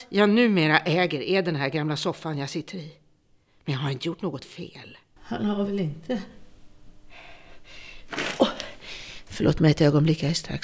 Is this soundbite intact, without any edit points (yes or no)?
no